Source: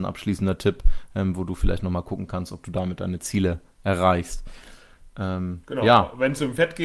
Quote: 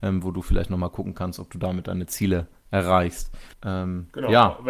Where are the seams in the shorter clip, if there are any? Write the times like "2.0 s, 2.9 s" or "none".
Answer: 3.5 s